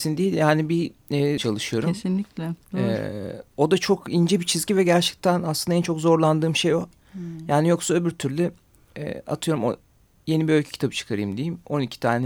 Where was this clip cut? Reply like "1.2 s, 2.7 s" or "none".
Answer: 1.4 s